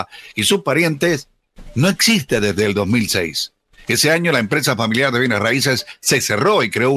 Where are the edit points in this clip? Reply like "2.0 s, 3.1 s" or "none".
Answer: none